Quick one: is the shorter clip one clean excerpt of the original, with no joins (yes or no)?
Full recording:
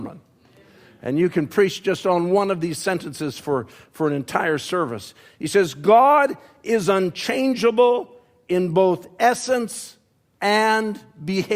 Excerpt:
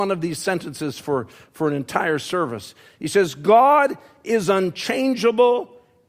yes